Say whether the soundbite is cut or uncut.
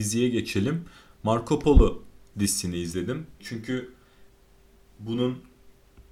cut